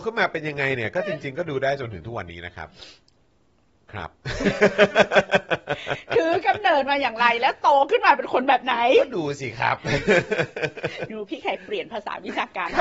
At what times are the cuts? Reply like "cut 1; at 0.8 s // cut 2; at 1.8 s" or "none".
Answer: none